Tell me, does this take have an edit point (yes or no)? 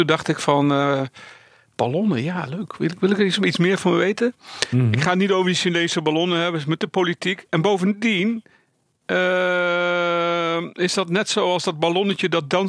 no